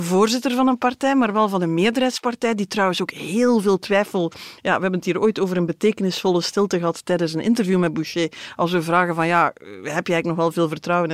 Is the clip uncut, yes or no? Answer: yes